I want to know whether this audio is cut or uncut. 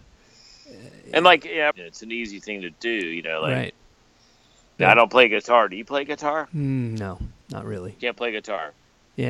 cut